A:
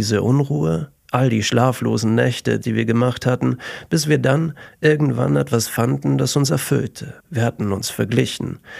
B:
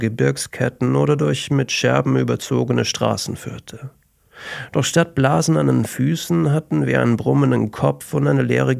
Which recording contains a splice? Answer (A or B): A